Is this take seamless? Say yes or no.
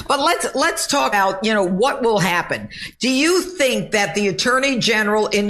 no